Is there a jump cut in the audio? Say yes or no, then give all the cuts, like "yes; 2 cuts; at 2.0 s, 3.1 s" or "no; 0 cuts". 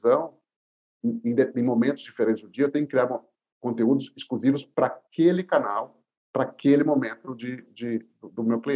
no; 0 cuts